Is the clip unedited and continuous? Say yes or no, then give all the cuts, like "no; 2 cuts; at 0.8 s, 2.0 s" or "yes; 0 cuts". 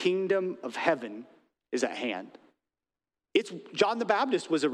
no; 1 cut; at 3.2 s